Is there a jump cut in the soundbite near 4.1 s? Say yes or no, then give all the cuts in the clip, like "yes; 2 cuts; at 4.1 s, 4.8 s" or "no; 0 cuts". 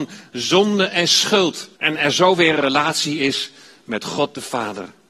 no; 1 cut; at 1.7 s